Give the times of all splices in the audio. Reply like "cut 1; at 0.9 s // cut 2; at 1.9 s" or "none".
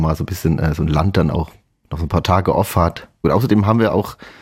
cut 1; at 3.2 s